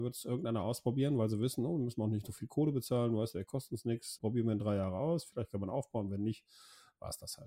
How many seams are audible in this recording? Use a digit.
1